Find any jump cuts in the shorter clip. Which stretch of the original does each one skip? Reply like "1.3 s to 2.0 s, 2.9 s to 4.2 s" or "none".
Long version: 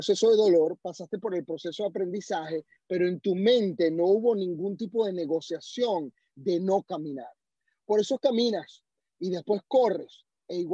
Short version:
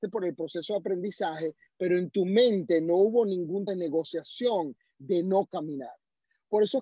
4.8 s to 5.0 s

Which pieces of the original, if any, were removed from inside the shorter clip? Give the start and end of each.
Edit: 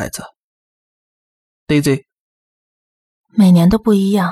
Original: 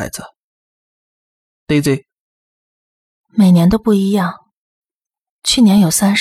none

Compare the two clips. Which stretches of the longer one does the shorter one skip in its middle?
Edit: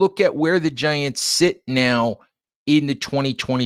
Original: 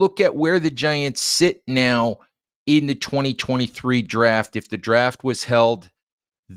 none

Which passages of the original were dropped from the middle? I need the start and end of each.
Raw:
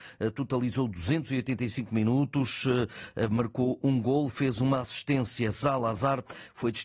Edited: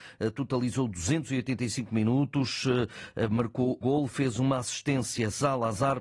3.8 s to 4.0 s

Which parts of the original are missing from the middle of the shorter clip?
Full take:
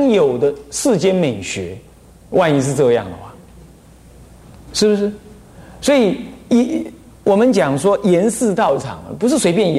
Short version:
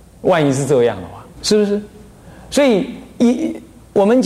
3.4 s to 4.6 s

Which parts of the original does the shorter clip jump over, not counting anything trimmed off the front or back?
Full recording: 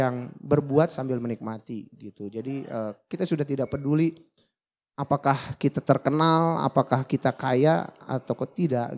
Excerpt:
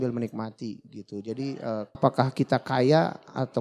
3.0 s to 6.7 s

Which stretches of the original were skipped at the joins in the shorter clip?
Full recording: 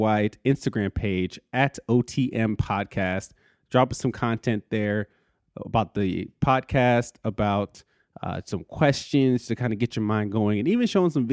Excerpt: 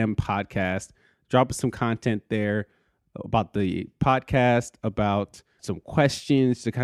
8.0 s to 8.4 s

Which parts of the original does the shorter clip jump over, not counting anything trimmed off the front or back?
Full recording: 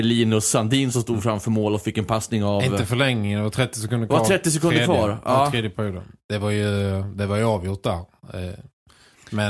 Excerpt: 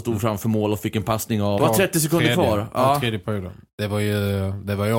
2.6 s to 4.1 s

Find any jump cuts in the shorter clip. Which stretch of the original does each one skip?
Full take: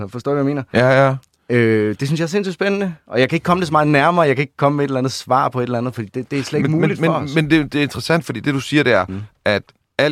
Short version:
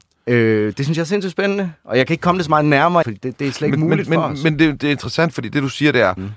4.2 s to 5.9 s

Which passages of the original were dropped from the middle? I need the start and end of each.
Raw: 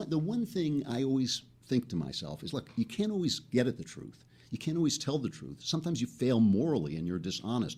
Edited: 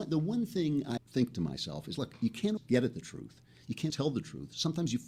1.0 s to 1.5 s, 3.1 s to 3.4 s, 4.7 s to 5.0 s

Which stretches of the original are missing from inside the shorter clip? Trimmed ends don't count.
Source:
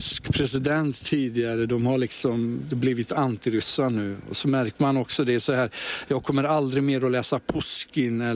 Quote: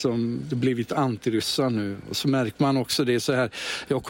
none

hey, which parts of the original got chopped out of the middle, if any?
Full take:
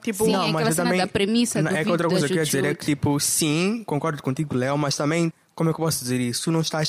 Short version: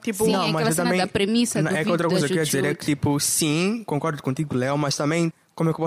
none

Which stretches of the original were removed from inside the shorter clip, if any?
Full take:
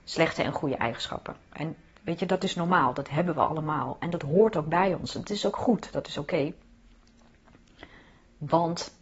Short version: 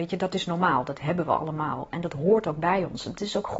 none

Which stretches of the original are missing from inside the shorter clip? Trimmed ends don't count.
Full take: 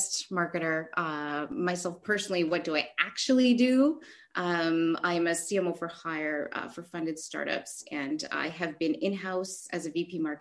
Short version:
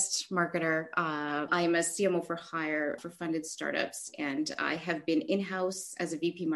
1.5 s to 5.0 s, 6.5 s to 6.7 s

